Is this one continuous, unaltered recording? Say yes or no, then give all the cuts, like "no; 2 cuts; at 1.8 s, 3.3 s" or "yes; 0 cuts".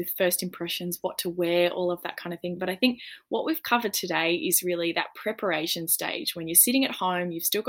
yes; 0 cuts